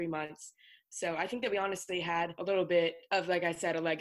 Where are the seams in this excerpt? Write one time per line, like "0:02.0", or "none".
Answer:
0:00.9